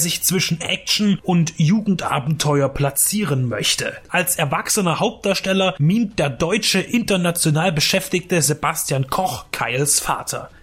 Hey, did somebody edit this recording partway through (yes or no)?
yes